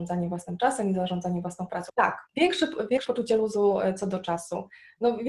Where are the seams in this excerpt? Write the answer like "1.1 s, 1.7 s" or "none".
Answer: 1.9 s